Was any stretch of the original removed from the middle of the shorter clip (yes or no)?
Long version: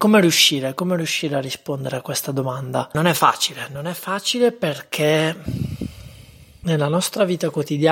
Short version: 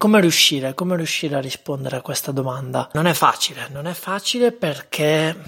no